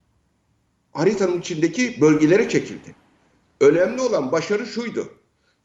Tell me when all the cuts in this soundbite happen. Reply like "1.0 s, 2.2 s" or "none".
3.4 s